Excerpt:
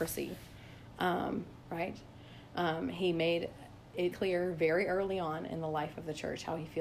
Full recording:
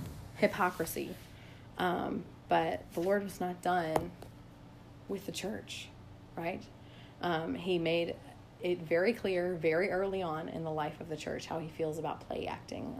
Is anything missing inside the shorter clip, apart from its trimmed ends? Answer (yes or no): yes